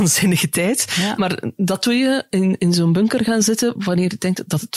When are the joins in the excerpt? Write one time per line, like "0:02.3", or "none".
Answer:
none